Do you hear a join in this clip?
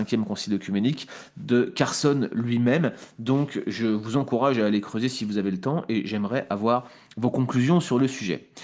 no; 0 cuts

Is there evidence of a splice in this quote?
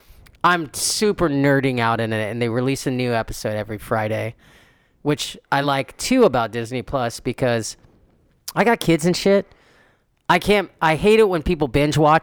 no; 0 cuts

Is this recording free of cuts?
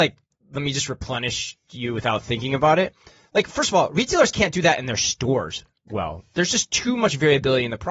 yes; 0 cuts

